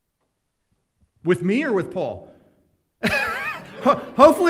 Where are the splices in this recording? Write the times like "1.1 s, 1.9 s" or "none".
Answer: none